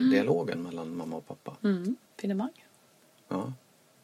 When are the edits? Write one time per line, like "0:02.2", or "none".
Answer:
0:02.0